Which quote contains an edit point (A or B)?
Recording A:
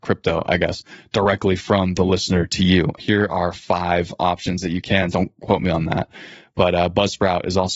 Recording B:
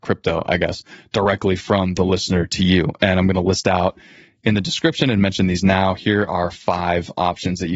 A